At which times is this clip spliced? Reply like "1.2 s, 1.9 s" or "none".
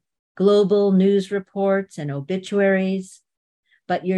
none

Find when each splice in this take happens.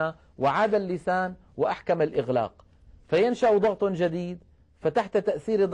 none

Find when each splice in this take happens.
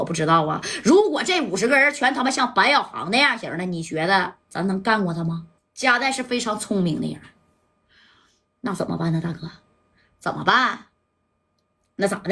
5.6 s

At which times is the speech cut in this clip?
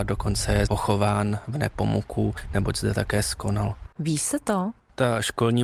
3.9 s

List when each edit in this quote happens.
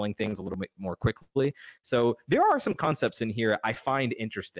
none

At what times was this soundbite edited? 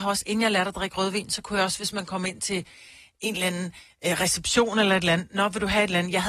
none

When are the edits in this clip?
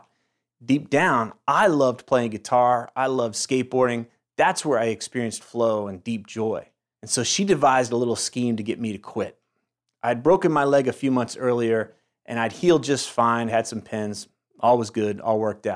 6.9 s, 13.5 s

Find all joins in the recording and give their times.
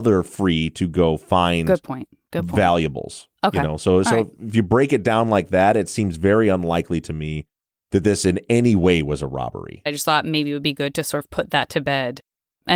9.9 s

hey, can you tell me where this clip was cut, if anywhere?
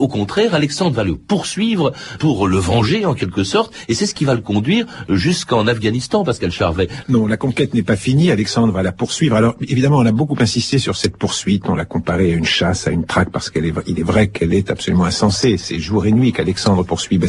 7.0 s

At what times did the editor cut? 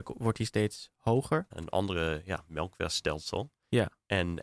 1.5 s

